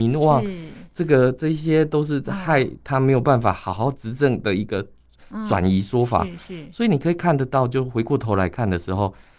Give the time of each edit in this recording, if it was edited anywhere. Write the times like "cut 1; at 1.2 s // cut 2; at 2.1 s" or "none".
none